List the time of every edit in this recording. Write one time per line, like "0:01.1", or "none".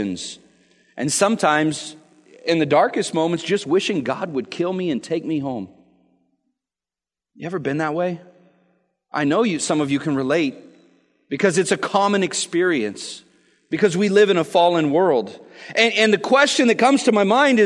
none